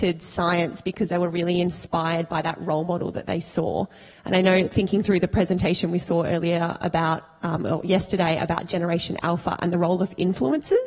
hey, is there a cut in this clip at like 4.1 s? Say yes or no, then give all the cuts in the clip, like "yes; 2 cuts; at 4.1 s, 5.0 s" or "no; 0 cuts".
no; 1 cut; at 6.8 s